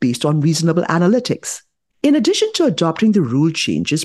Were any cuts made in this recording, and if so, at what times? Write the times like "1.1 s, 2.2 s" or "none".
1.9 s